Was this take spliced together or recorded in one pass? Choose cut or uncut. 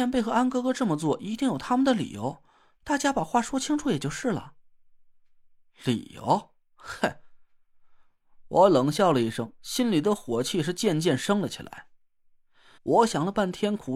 cut